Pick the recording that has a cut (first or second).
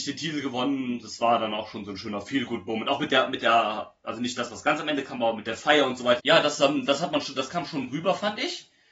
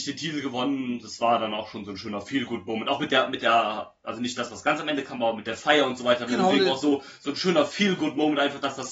first